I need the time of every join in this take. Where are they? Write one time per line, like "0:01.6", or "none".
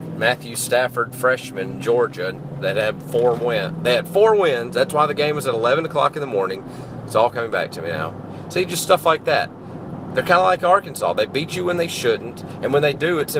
none